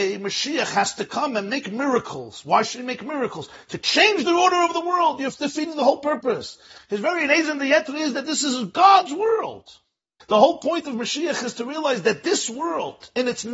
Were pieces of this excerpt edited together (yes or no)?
yes